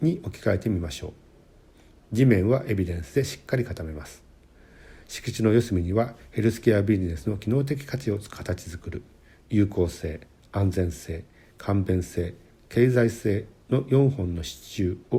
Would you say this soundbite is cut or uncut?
uncut